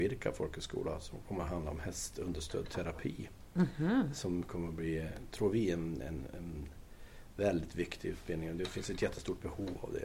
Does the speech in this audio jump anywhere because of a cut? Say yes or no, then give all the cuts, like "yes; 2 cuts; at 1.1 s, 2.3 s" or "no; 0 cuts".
no; 0 cuts